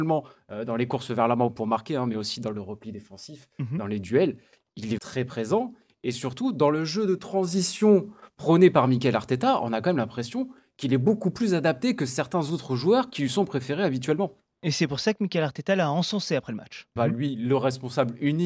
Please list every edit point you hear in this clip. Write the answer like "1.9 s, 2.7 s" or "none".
5.0 s, 17.0 s